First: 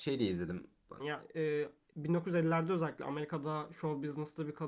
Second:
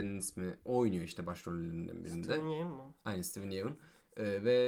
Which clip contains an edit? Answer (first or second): first